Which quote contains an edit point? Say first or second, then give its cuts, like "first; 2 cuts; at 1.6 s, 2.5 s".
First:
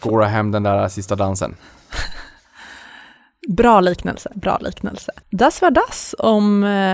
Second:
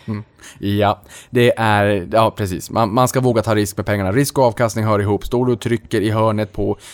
first; 1 cut; at 5.2 s